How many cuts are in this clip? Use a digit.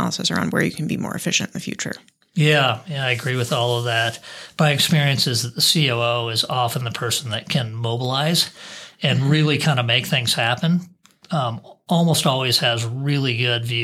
0